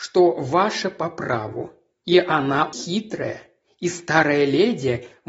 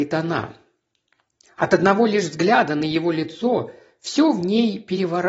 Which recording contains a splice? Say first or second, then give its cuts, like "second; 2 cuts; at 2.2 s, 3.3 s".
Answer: first; 1 cut; at 2.7 s